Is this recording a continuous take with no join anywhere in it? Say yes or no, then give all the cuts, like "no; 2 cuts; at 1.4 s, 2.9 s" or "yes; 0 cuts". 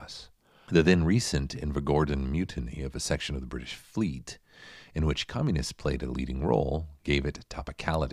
yes; 0 cuts